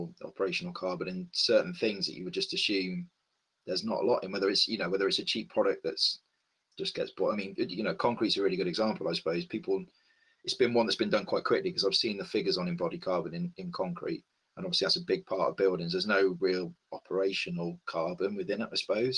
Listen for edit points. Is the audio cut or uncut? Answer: uncut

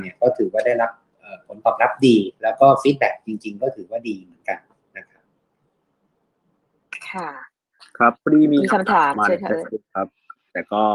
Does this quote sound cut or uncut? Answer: cut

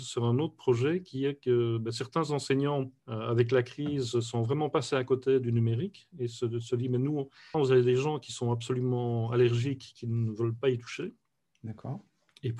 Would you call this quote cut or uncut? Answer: cut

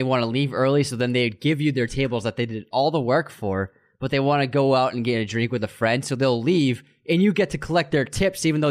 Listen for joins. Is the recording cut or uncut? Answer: uncut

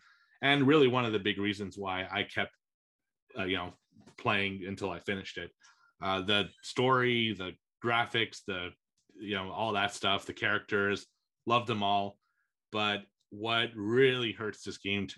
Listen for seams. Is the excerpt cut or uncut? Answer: uncut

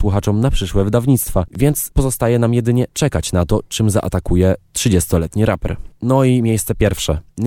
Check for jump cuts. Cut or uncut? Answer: uncut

